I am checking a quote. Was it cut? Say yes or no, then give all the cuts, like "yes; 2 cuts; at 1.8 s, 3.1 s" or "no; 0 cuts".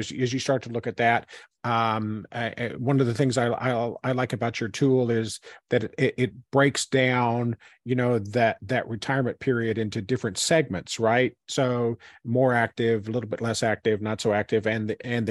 no; 0 cuts